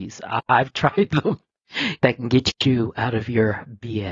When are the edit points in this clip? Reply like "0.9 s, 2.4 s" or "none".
2.0 s

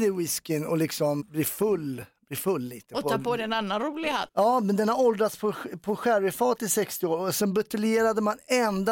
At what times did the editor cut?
1.2 s, 4.3 s

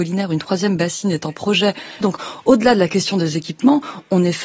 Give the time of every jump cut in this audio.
2.0 s

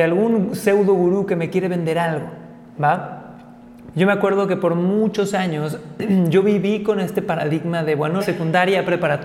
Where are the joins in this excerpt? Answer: 3.9 s, 8.2 s

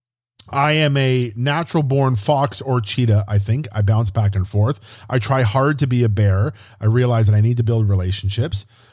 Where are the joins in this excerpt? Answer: none

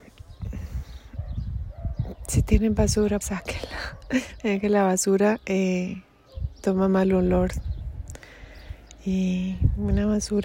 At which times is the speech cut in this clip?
3.2 s

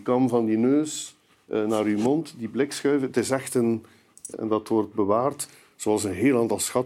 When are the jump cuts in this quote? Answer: 4.3 s

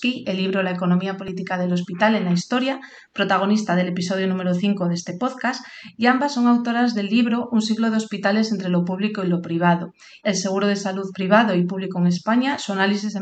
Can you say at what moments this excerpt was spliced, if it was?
10.2 s

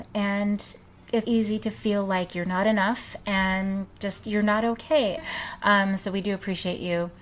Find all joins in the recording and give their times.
1.2 s, 5.2 s

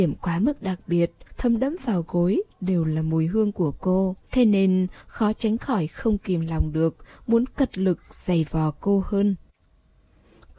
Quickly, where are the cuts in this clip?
1.3 s, 4.2 s

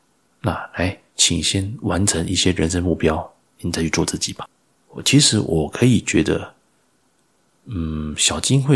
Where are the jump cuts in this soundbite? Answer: none

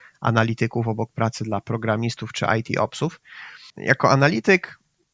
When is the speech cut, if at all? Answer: 3.7 s

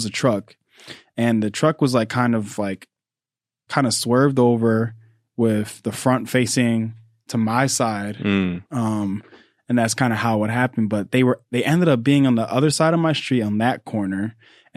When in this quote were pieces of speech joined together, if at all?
3.7 s, 8.7 s

